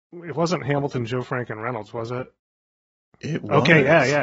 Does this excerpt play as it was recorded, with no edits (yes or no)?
yes